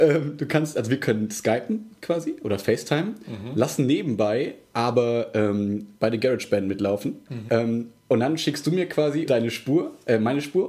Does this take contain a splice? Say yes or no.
yes